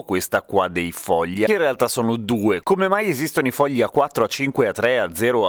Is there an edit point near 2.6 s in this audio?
yes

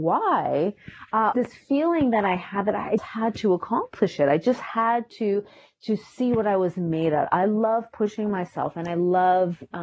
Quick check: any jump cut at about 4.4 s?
no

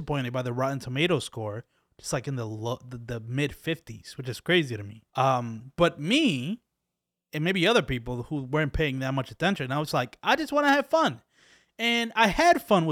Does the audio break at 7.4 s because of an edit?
no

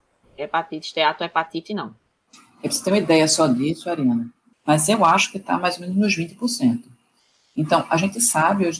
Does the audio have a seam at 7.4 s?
no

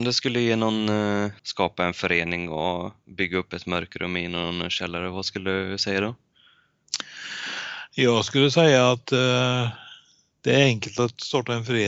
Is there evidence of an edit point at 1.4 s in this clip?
yes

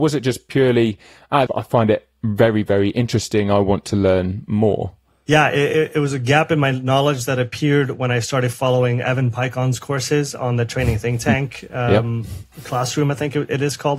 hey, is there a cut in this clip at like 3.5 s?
no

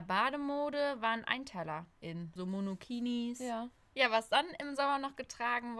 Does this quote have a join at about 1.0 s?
no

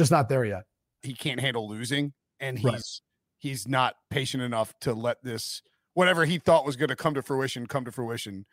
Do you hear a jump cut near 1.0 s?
yes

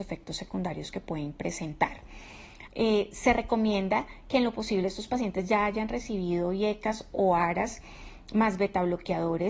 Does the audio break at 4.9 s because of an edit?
no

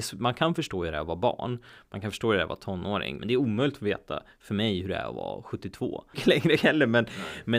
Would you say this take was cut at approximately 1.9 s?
no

